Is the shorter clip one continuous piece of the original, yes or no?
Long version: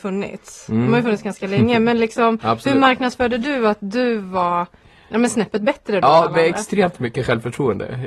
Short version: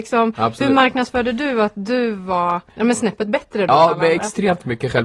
no